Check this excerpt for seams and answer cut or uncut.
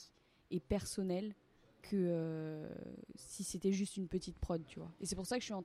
uncut